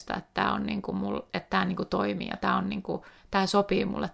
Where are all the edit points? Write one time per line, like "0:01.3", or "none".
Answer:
none